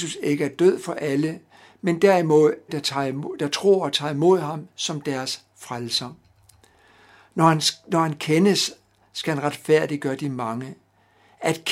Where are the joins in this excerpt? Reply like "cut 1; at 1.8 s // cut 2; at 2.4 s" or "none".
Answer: cut 1; at 2.7 s